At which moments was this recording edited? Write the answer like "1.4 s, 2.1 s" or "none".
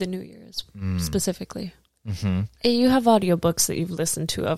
2.6 s